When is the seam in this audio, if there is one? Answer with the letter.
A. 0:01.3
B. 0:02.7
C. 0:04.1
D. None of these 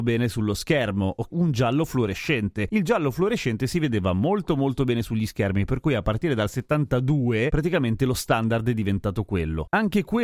A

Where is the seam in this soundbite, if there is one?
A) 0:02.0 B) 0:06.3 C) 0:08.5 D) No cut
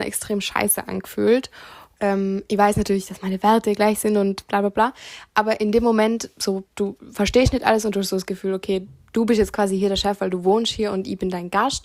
A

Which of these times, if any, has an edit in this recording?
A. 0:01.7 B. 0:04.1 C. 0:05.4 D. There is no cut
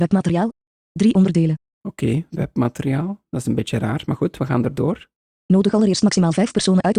A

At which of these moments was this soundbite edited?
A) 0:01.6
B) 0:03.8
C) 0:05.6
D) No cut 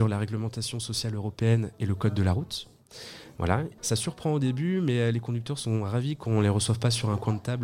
B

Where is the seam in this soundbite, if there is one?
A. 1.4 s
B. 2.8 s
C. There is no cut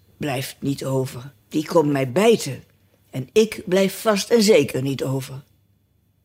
A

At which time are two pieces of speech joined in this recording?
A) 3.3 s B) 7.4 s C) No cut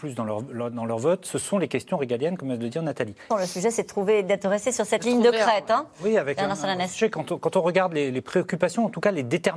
A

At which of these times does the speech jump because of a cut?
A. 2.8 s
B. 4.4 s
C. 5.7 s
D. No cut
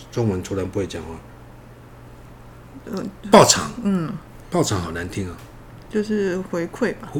A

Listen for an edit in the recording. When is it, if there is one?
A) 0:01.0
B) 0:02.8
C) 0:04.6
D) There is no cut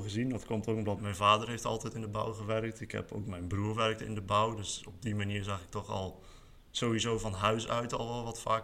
A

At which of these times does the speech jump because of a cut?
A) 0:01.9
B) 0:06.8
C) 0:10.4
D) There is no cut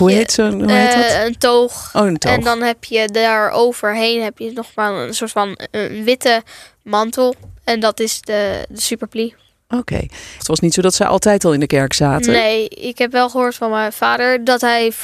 C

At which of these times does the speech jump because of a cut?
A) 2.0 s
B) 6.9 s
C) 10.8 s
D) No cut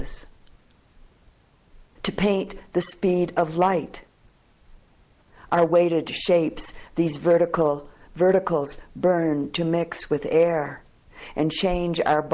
A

